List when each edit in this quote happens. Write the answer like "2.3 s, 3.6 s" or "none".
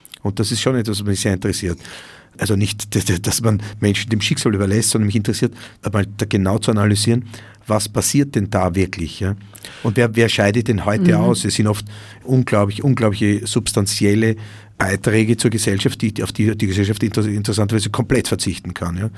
none